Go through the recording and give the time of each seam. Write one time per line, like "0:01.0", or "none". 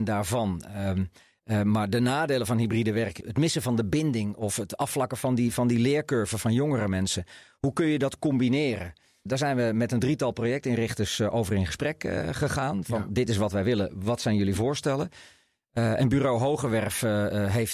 none